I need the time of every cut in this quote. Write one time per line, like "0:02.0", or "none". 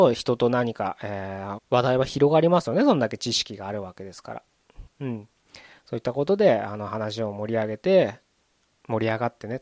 0:01.6
0:04.9